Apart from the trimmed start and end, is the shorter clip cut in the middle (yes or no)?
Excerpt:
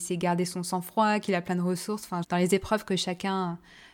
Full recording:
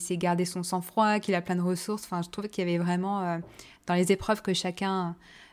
yes